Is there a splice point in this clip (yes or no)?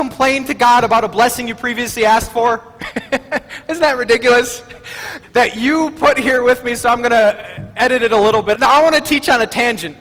yes